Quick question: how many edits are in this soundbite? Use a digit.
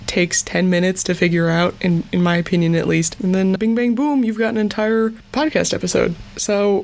1